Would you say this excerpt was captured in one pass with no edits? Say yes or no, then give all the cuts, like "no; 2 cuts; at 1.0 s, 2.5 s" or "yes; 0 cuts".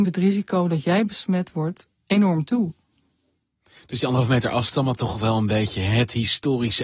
no; 1 cut; at 2.0 s